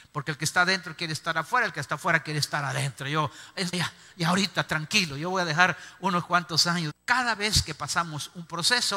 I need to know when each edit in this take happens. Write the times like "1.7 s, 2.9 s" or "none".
3.7 s, 6.9 s